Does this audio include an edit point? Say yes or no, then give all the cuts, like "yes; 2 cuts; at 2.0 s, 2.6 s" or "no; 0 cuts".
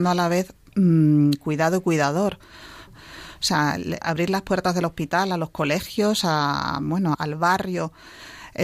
yes; 3 cuts; at 2.9 s, 4.0 s, 7.1 s